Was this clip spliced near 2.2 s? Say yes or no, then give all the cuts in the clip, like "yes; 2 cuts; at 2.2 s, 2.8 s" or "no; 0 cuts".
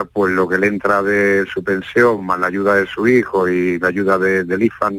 no; 0 cuts